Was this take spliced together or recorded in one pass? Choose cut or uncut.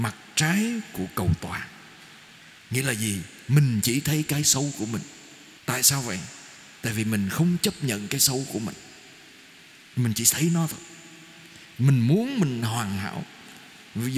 cut